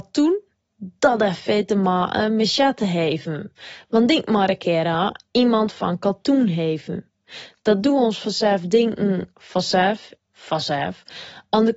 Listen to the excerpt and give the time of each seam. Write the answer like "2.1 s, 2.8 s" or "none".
10.2 s